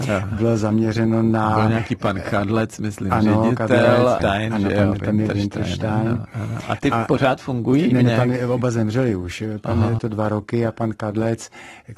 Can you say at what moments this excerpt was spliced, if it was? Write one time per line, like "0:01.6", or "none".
0:04.2
0:10.0